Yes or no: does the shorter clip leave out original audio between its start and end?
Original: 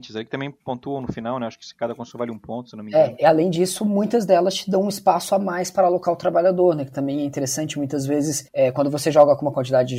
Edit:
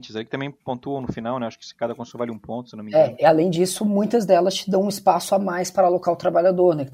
no